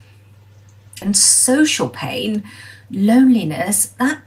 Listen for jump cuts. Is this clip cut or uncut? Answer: cut